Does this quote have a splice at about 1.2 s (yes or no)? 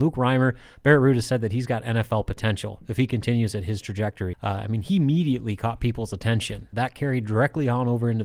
no